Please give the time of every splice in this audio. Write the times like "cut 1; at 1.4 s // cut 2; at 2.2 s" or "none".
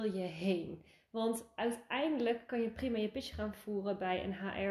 none